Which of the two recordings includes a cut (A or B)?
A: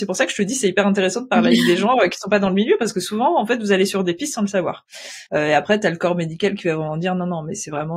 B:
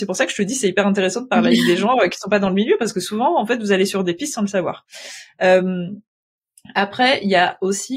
A